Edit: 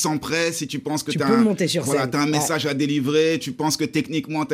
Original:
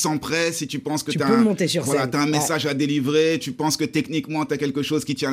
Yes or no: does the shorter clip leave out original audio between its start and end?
no